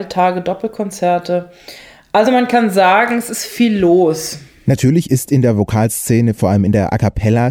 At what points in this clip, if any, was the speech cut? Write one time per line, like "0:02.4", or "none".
none